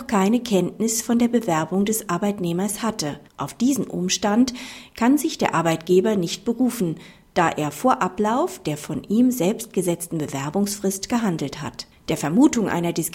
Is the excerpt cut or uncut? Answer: cut